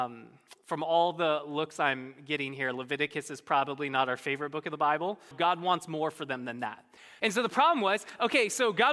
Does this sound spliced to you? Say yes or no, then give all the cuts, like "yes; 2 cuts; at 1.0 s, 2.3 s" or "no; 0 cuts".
yes; 2 cuts; at 5.3 s, 7.2 s